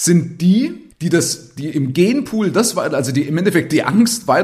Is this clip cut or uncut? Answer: cut